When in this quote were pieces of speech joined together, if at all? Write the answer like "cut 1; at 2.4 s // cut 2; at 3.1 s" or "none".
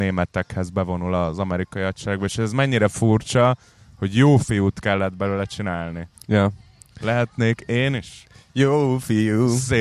none